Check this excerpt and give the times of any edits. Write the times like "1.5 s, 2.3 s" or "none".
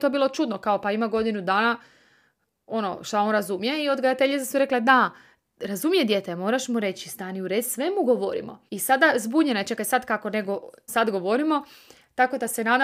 8.7 s, 10.9 s